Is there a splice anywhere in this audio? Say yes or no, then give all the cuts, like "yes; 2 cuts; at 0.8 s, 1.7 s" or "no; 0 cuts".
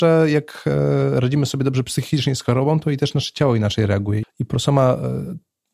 yes; 1 cut; at 4.2 s